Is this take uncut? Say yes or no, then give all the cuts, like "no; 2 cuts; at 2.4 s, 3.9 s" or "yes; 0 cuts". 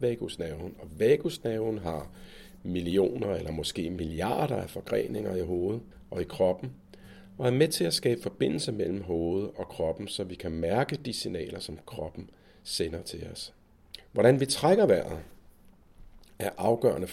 yes; 0 cuts